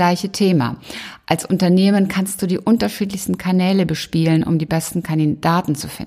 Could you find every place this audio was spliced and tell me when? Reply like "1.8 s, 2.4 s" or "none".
none